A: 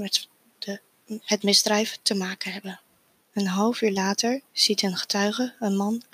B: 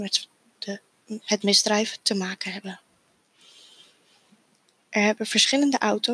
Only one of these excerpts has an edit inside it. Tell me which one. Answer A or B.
A